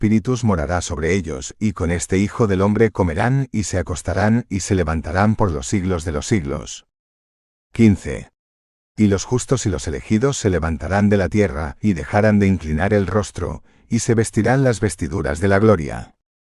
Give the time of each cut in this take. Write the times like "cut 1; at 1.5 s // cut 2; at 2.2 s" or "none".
none

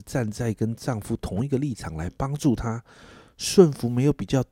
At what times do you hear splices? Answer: none

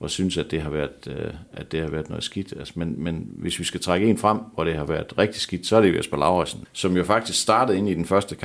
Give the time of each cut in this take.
cut 1; at 6.6 s

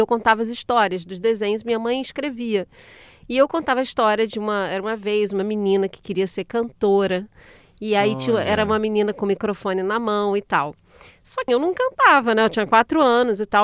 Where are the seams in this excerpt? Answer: cut 1; at 11.5 s

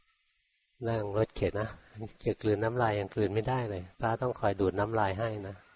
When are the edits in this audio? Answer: cut 1; at 1.5 s // cut 2; at 3.9 s

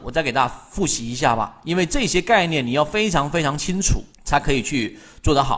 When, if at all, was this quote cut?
cut 1; at 4.1 s

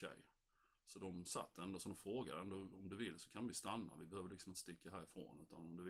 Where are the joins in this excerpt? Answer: none

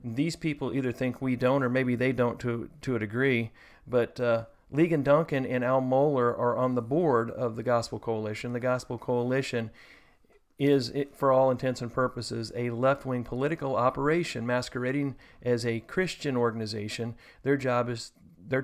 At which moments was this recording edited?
none

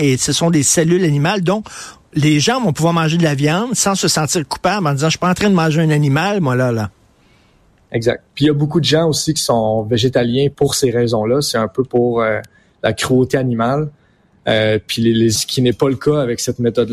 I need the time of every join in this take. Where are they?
cut 1; at 15.4 s

